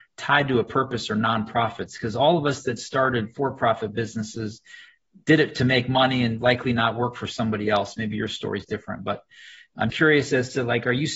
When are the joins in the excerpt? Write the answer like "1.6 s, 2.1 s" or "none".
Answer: 9.9 s